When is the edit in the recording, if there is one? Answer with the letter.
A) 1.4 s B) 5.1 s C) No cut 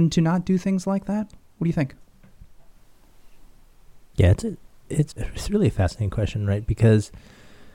B